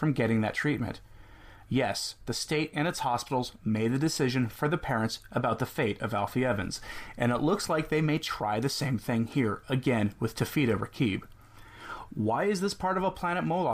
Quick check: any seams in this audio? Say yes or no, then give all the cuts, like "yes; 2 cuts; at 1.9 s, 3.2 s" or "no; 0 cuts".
no; 0 cuts